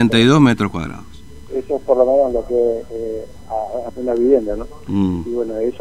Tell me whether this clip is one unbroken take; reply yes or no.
no